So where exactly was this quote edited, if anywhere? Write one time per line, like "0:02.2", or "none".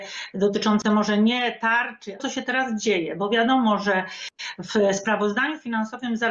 0:02.2